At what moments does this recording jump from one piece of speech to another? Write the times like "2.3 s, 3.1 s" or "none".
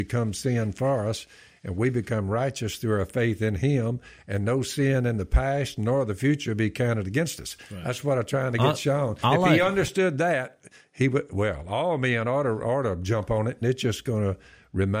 13.6 s